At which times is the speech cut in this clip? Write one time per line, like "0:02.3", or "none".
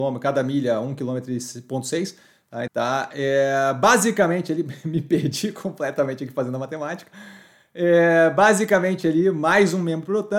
0:02.7